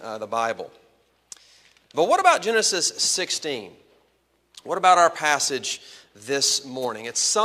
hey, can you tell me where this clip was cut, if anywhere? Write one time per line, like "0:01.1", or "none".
none